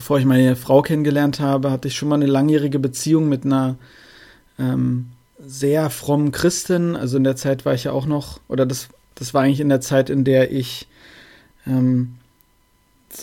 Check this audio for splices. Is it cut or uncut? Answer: uncut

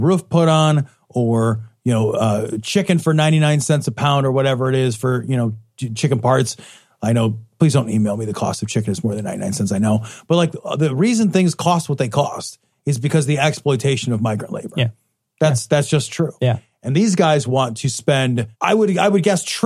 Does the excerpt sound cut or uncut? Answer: cut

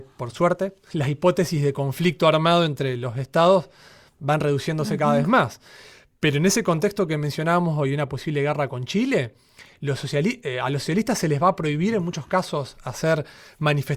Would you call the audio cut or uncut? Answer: uncut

